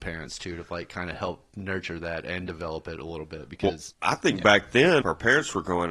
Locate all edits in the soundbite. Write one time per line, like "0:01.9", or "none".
0:03.9
0:05.0